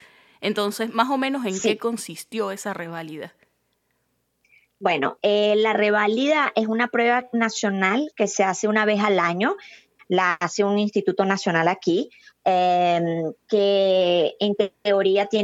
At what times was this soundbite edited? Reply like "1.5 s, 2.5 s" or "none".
none